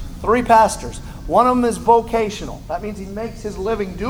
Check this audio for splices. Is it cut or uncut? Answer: uncut